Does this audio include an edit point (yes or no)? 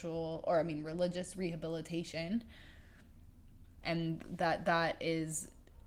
yes